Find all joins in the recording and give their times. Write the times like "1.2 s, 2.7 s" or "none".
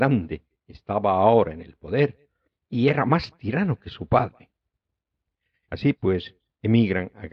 5.6 s